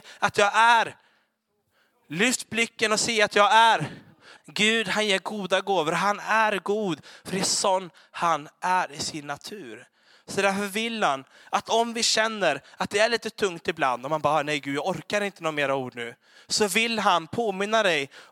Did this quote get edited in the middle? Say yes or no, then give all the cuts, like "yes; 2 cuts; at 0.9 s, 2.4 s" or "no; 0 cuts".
yes; 1 cut; at 4.4 s